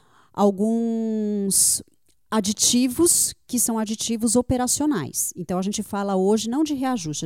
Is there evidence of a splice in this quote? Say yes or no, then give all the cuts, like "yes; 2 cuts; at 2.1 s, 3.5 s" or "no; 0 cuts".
no; 0 cuts